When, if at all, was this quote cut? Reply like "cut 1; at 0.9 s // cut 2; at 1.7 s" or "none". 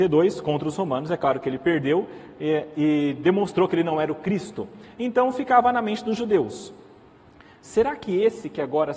cut 1; at 4.9 s